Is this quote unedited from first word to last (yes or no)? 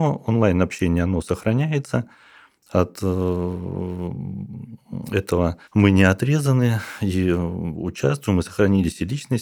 no